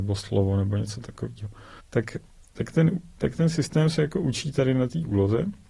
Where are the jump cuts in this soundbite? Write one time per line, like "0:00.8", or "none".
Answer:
0:01.8